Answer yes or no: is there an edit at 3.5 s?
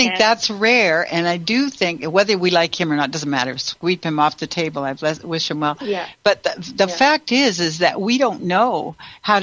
no